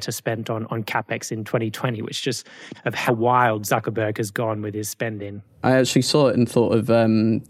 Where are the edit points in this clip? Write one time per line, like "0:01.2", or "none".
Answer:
0:02.7
0:05.6